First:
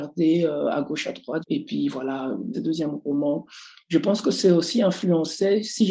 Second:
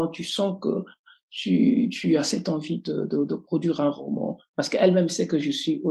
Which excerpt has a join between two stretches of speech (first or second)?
first